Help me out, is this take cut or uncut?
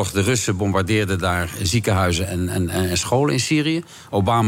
uncut